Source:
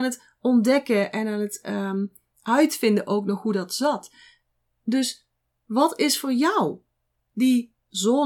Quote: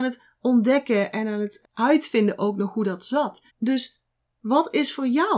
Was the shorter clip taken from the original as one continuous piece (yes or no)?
no